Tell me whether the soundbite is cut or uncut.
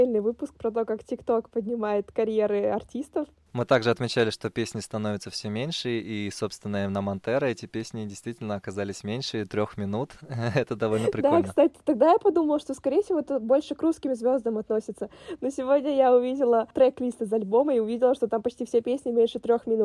uncut